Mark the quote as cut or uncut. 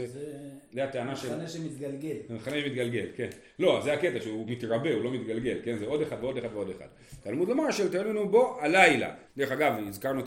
cut